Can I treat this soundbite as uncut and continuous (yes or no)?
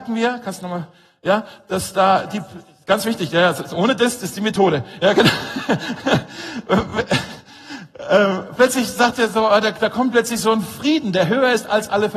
yes